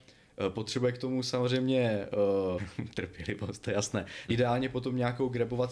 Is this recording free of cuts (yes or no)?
no